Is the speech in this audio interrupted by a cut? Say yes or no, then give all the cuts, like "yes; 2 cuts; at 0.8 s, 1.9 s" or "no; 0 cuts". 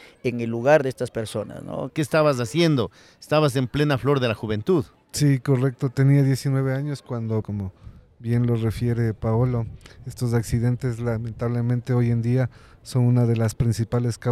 yes; 2 cuts; at 1.9 s, 7.4 s